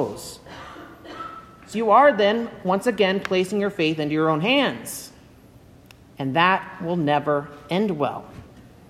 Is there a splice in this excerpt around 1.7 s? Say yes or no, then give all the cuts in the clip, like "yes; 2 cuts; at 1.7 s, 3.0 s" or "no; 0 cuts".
yes; 1 cut; at 1.7 s